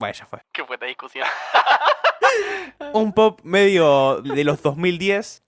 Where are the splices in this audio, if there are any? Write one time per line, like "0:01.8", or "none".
0:04.2